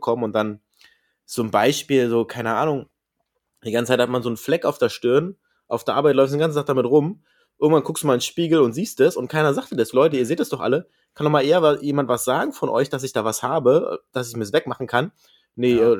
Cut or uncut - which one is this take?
cut